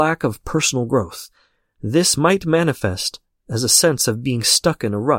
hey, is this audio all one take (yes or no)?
yes